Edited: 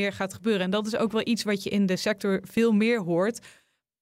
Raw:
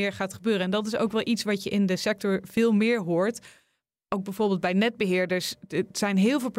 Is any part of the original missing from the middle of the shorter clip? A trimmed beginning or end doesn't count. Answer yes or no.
no